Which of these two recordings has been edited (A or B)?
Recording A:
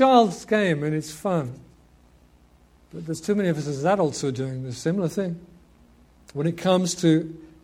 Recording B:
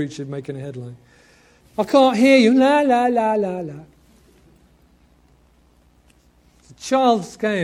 B